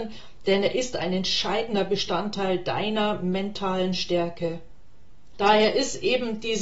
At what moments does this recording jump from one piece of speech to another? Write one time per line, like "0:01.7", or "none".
0:05.3